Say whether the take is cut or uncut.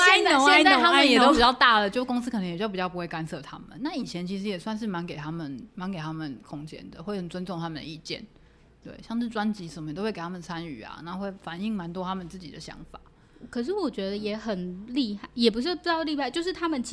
uncut